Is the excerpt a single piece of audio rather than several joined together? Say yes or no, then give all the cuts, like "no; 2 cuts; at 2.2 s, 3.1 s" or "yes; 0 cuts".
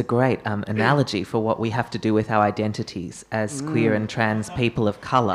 yes; 0 cuts